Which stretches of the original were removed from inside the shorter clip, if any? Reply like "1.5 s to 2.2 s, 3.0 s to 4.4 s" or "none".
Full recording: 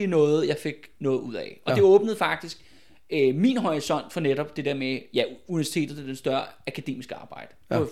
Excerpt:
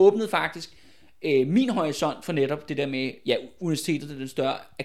none